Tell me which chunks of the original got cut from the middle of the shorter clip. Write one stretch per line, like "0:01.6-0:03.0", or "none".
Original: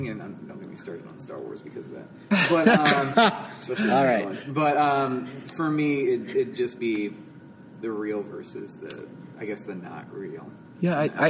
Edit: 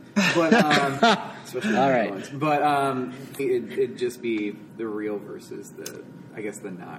0:05.5-0:06.0
0:07.3-0:07.7